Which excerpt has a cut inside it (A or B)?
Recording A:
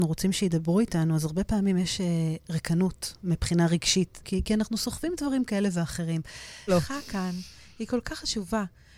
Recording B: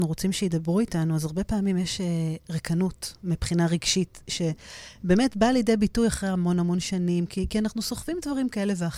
A